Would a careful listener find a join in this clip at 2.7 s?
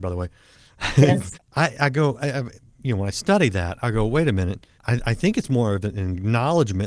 no; 2 cuts; at 1.3 s, 4.7 s

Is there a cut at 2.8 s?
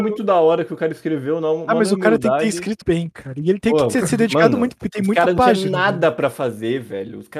yes; 1 cut; at 2.8 s

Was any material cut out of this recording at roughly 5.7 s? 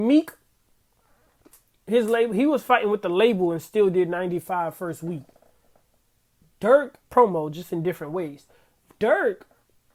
no; 1 cut; at 7.0 s

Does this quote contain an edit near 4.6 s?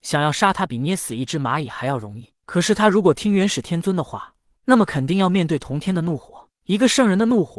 yes; 2 cuts; at 2.4 s, 4.6 s

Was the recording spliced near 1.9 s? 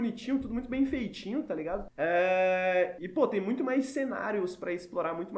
yes; 2 cuts; at 1.9 s, 3.0 s

